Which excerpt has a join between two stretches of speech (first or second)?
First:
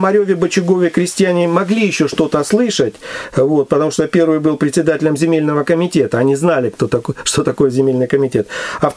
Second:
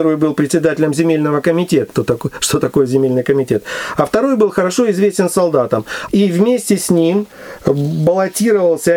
second